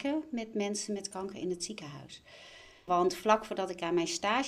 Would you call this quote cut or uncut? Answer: cut